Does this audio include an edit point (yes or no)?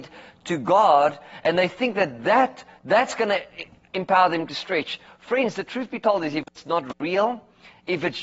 no